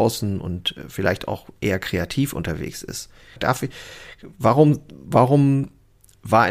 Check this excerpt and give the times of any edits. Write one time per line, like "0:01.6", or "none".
0:03.4